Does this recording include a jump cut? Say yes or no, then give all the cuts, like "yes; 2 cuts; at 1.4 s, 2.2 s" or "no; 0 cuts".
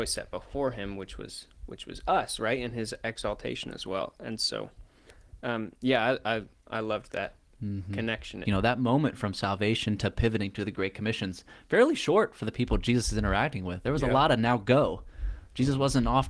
yes; 1 cut; at 8.4 s